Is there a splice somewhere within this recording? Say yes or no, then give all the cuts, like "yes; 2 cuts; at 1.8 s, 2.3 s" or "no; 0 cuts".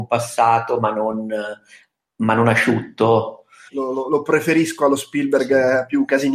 yes; 1 cut; at 3.7 s